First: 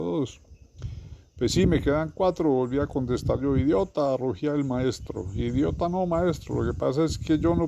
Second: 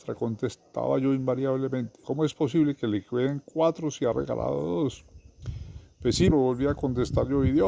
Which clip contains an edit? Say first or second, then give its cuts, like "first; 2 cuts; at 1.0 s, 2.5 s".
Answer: second; 2 cuts; at 2.0 s, 6.3 s